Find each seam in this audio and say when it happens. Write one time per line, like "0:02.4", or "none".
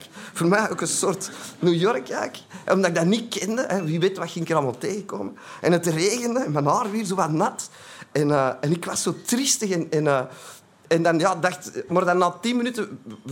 none